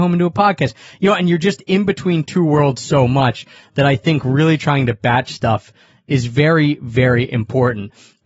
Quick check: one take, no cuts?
yes; 0 cuts

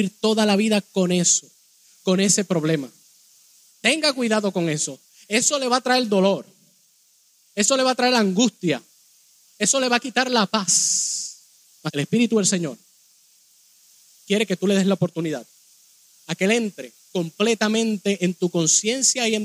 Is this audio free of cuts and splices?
no; 3 cuts; at 3.7 s, 11.9 s, 17.0 s

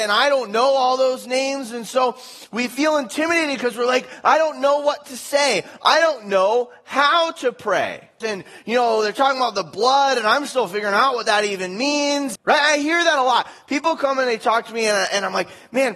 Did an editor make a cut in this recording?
yes; 2 cuts; at 8.2 s, 12.4 s

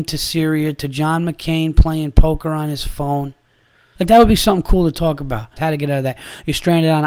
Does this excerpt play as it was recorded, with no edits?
no; 2 cuts; at 4.0 s, 5.6 s

